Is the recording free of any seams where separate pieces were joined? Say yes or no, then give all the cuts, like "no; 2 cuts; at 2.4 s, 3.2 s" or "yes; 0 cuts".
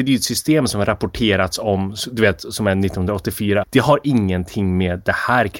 no; 1 cut; at 3.6 s